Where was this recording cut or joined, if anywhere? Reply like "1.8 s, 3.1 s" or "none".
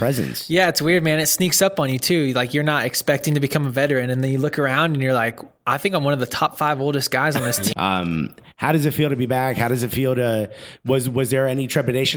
7.7 s